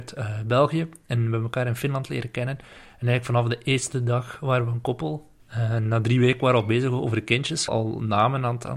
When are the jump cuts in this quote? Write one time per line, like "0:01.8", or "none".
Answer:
0:05.4
0:07.7

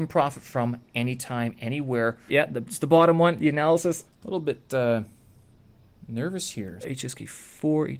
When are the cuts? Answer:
0:02.3
0:04.1
0:06.8

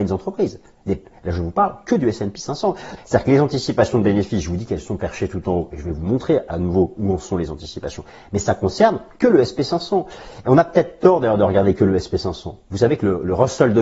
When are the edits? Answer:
0:03.0

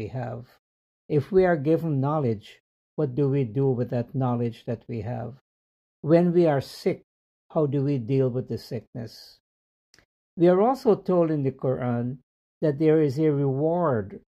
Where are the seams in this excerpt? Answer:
none

